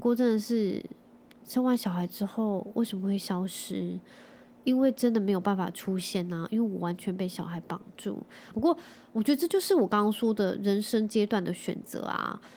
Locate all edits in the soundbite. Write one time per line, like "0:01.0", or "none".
0:08.5